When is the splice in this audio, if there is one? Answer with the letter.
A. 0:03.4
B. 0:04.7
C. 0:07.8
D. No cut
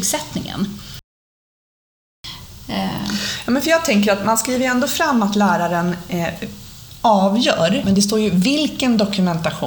C